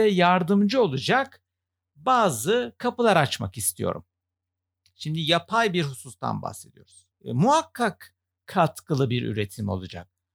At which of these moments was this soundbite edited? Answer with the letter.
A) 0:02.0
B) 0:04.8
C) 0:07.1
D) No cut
C